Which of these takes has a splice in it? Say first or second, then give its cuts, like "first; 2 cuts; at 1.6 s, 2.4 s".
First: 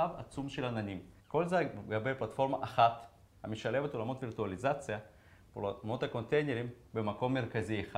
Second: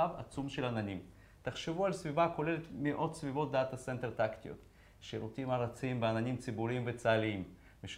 first; 1 cut; at 1.2 s